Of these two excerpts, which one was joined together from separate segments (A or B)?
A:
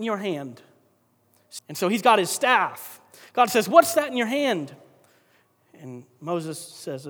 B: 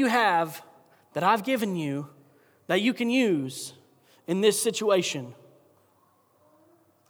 A